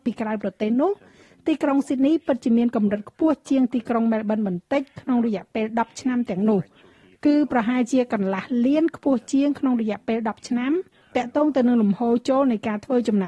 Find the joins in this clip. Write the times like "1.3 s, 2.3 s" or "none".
none